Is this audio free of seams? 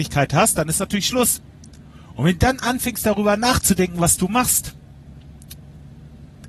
yes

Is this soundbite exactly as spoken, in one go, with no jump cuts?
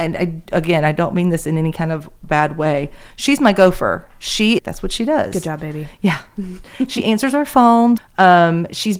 no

